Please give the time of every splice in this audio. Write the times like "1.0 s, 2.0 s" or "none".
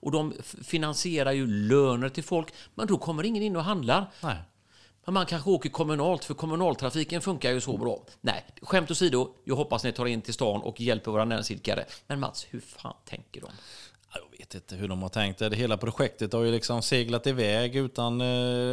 none